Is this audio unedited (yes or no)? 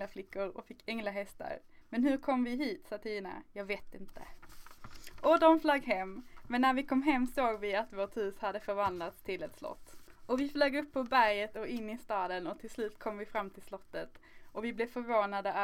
yes